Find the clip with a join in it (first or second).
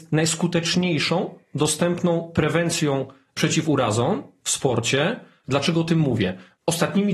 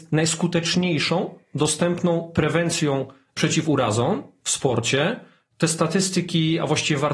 first